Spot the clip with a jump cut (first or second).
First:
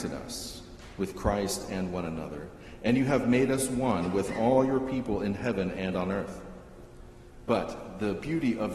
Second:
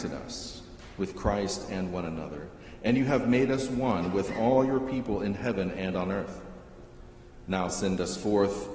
first